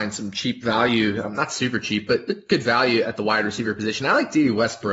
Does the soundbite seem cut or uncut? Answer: uncut